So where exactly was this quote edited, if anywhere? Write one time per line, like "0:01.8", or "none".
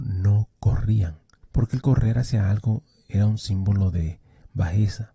0:01.4